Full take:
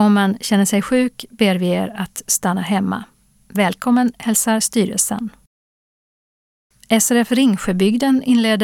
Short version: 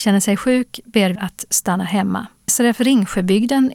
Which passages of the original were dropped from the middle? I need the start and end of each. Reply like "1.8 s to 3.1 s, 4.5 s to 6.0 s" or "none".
1.6 s to 1.9 s, 3.3 s to 7.0 s